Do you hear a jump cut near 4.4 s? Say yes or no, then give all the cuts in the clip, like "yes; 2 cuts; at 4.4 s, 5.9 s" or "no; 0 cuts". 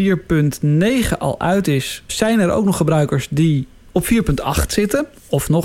no; 1 cut; at 2.1 s